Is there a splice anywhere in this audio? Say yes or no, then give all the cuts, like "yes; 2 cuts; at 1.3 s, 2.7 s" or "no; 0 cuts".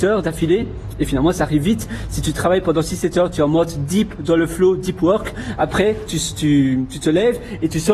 no; 0 cuts